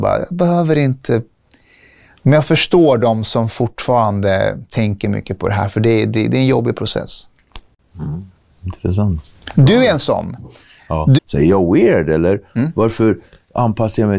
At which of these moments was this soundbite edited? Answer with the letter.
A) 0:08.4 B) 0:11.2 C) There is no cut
B